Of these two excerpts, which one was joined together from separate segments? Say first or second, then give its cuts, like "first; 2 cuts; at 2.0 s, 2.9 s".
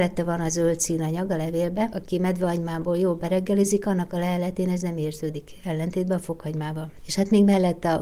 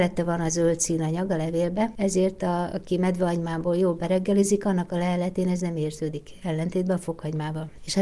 first; 1 cut; at 1.9 s